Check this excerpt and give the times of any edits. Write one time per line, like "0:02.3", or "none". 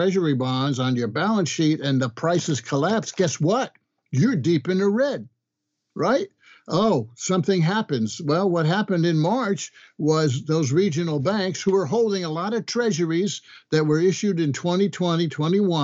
none

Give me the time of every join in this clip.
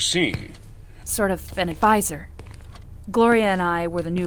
0:01.0

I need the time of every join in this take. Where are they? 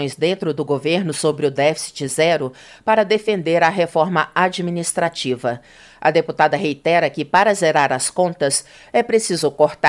none

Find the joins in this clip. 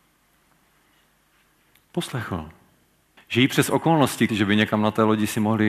0:03.2
0:04.3

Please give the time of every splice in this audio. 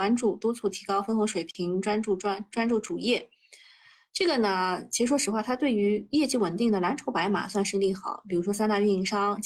none

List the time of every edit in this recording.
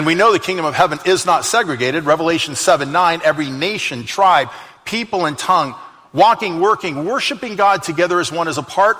none

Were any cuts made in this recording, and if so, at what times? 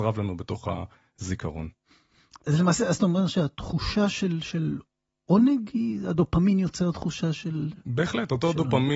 0:02.4

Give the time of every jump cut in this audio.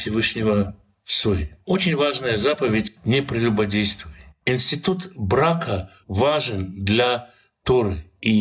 0:06.0

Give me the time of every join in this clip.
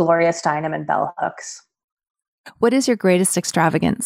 none

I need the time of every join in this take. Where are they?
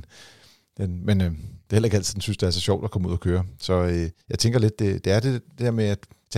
0:04.2

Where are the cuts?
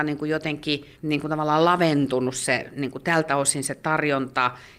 0:00.9

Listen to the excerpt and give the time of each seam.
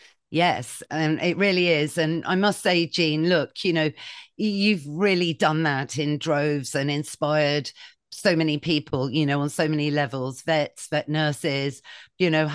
none

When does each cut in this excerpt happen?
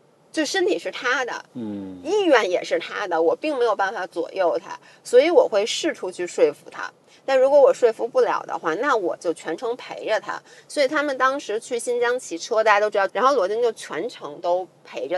0:13.1

